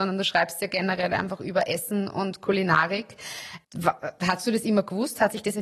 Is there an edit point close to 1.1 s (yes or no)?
no